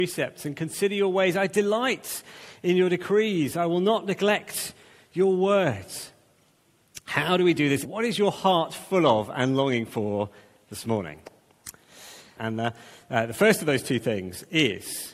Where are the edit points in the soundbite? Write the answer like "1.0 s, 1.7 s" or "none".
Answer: 7.8 s, 12.4 s